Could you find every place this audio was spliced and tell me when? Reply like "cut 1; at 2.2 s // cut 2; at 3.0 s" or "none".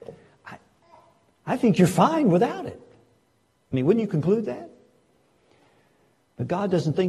cut 1; at 2.9 s